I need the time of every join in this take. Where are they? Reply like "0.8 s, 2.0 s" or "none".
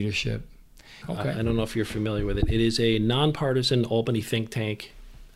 1.0 s